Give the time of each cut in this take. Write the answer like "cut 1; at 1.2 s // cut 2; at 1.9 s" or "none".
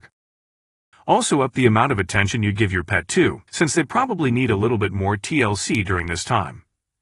cut 1; at 0.9 s // cut 2; at 3.5 s